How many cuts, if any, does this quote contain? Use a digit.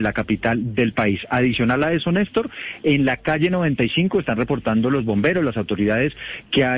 0